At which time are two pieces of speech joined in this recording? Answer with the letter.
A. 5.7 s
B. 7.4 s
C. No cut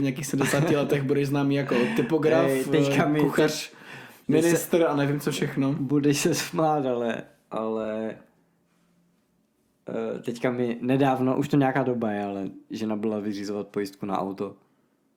C